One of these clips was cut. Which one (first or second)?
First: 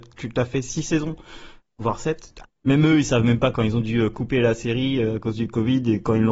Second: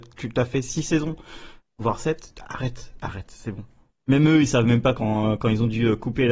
first